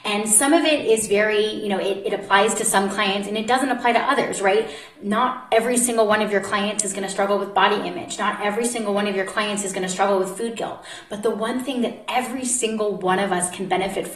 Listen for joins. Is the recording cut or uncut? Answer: uncut